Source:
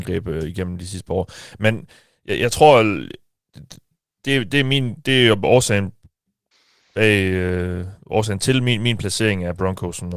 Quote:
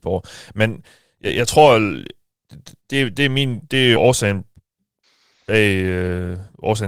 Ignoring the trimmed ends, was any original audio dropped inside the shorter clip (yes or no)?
yes